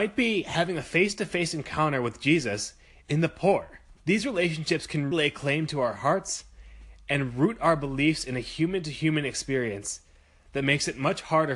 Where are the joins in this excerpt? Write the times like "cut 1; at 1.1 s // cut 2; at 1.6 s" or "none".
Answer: cut 1; at 4.0 s // cut 2; at 5.1 s